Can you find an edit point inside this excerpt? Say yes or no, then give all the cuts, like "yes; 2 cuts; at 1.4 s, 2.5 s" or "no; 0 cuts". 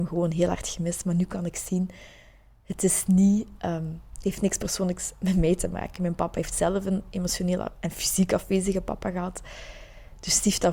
no; 0 cuts